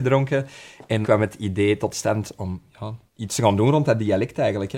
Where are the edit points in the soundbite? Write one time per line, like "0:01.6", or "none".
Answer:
0:01.0
0:03.1

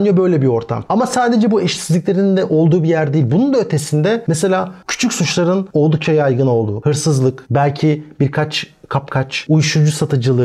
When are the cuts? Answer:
none

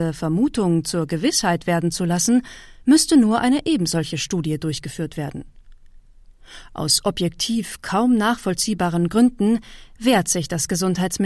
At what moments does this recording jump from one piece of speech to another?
none

